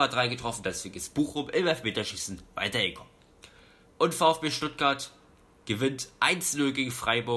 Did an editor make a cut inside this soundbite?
no; 0 cuts

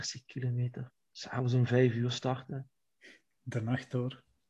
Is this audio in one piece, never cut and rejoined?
yes; 0 cuts

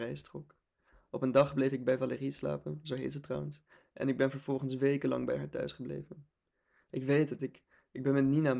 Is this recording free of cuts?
no; 1 cut; at 7.4 s

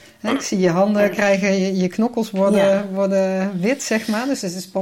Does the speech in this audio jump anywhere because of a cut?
no; 0 cuts

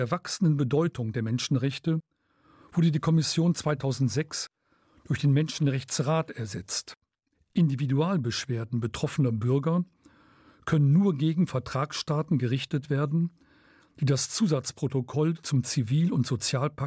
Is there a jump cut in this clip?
yes; 1 cut; at 7.3 s

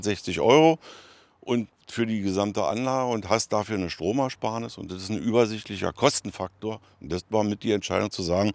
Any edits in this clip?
no; 0 cuts

